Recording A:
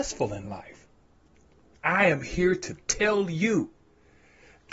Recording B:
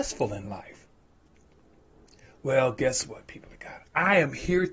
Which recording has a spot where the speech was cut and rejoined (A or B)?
A